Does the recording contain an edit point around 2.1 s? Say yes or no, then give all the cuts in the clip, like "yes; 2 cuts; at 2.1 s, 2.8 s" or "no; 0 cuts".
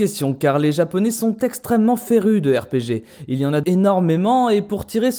no; 1 cut; at 3.6 s